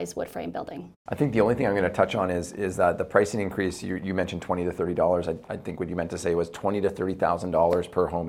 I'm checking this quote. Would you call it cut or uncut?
uncut